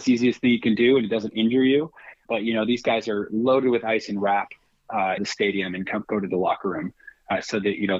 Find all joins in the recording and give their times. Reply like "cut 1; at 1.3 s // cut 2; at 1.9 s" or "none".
cut 1; at 5.2 s